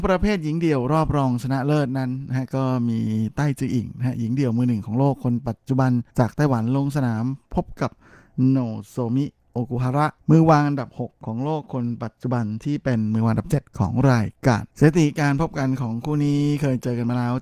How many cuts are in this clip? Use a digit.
3